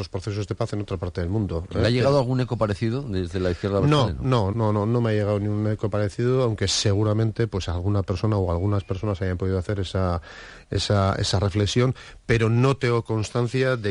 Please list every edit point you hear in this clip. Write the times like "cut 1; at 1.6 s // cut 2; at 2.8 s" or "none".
cut 1; at 4.5 s